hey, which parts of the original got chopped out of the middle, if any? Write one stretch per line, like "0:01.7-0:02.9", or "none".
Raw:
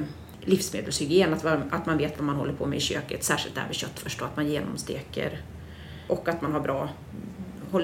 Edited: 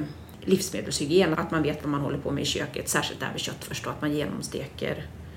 0:01.3-0:01.7